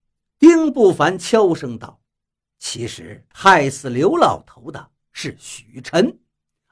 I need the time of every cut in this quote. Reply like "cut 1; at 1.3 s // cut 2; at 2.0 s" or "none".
cut 1; at 2.1 s // cut 2; at 3.3 s